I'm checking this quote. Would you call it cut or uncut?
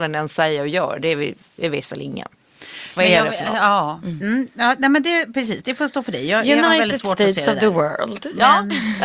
uncut